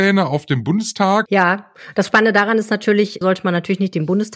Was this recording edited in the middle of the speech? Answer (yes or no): yes